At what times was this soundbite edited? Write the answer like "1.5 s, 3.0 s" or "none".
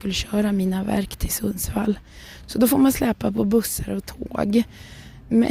none